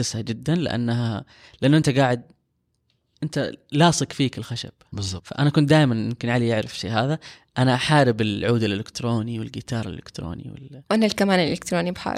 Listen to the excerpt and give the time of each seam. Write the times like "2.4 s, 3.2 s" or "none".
none